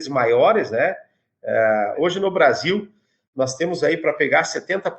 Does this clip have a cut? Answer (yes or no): yes